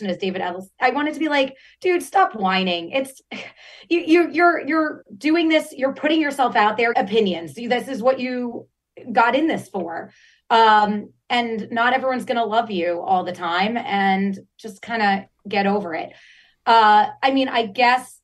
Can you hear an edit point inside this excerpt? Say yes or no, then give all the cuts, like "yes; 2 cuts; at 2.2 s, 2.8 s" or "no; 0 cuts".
yes; 1 cut; at 6.9 s